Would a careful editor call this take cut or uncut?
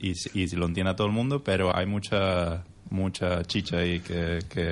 cut